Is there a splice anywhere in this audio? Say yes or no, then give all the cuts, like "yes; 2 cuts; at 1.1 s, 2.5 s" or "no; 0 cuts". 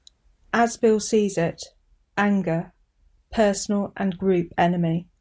yes; 1 cut; at 2.0 s